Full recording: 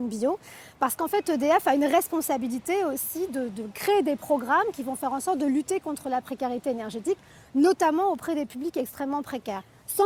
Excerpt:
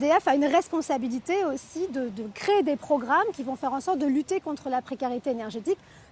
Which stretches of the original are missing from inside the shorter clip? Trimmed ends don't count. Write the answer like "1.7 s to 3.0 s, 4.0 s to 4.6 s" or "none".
none